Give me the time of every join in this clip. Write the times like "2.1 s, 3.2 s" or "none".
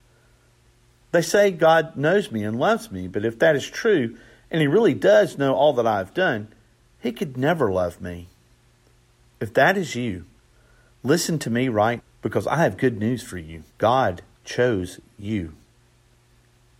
12.0 s, 13.7 s